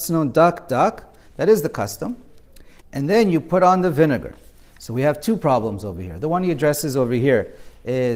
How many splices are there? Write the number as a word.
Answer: one